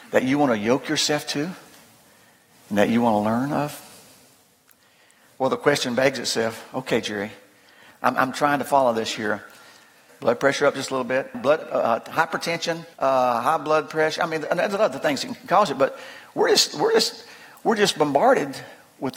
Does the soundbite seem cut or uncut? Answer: cut